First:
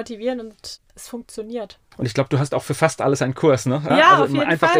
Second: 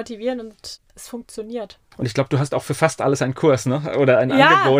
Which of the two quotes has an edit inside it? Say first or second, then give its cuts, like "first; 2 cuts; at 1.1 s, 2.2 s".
first; 1 cut; at 3.9 s